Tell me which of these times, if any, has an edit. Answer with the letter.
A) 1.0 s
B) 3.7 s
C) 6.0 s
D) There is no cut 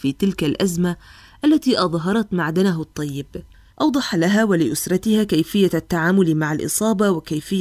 B